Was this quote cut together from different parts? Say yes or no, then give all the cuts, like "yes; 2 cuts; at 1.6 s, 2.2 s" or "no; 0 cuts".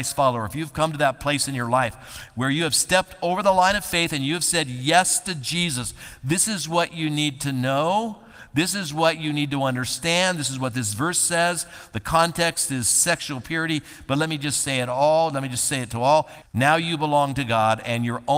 yes; 1 cut; at 16.4 s